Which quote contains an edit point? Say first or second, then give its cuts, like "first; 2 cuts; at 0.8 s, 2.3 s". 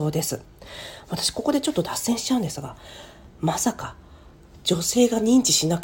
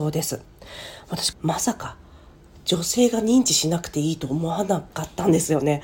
second; 1 cut; at 1.3 s